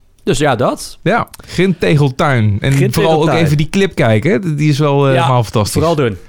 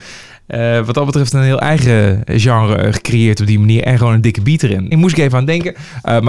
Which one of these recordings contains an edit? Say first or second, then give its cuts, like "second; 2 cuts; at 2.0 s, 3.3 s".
second; 1 cut; at 4.9 s